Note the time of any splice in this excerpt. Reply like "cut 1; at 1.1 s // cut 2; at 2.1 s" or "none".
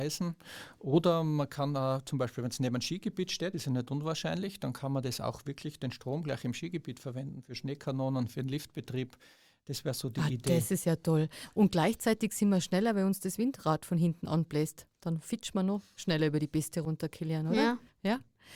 none